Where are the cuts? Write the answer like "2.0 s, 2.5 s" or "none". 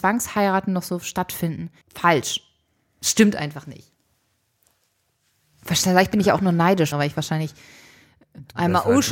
1.8 s, 6.9 s